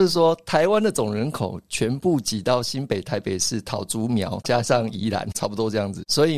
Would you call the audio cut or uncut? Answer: uncut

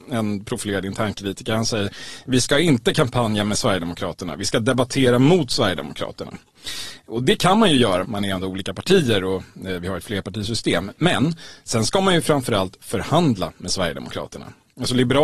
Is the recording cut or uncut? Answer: cut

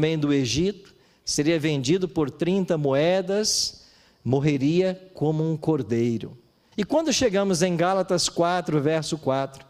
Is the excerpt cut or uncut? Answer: cut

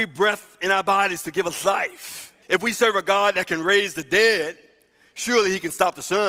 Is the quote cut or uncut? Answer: cut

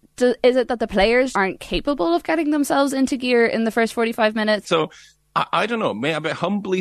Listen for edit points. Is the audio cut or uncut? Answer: cut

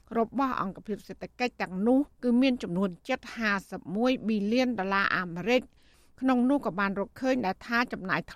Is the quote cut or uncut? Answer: cut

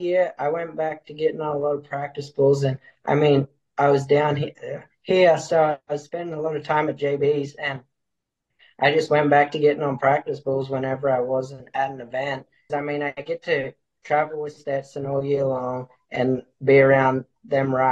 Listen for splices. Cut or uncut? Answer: cut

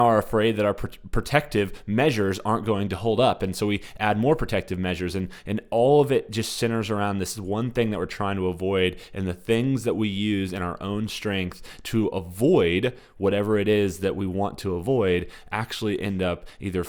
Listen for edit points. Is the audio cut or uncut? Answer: uncut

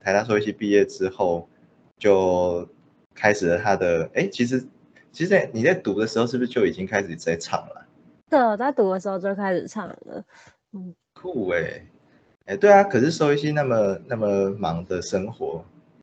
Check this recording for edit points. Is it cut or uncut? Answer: uncut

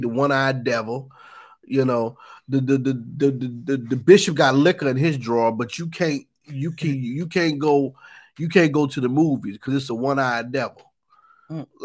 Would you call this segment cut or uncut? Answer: uncut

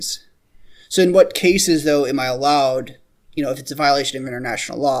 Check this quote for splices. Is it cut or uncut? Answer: uncut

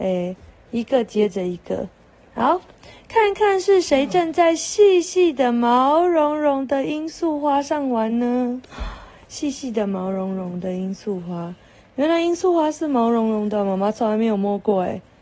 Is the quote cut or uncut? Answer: uncut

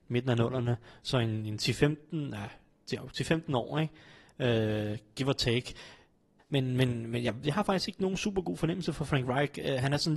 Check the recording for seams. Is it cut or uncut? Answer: cut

